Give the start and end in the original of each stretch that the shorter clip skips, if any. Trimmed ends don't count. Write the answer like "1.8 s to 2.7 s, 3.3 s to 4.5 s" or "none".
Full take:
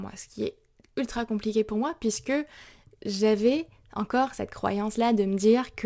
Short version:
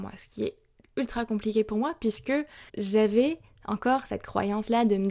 2.7 s to 3.0 s